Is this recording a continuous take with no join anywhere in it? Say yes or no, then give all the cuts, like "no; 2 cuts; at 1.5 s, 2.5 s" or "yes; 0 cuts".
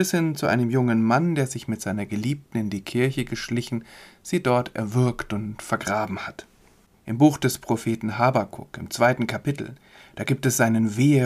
no; 1 cut; at 6.9 s